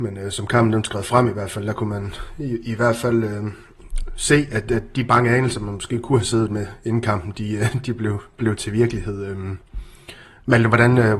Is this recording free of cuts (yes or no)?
yes